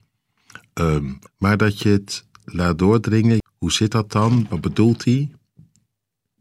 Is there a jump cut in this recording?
yes; 2 cuts; at 1.3 s, 3.4 s

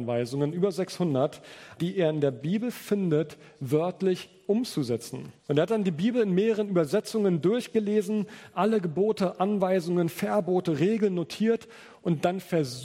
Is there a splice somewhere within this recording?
yes; 2 cuts; at 1.8 s, 5.4 s

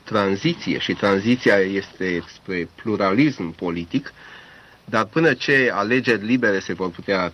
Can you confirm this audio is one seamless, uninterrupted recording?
no; 1 cut; at 2.2 s

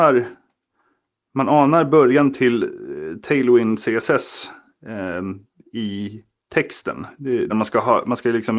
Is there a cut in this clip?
yes; 1 cut; at 7.5 s

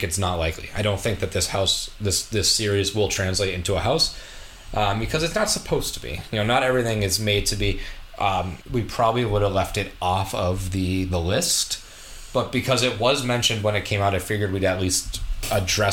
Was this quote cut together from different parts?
yes; 1 cut; at 8.6 s

